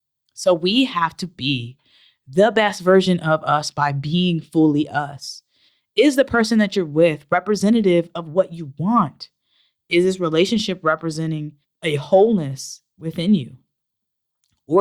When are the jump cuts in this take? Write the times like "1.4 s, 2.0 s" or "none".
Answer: none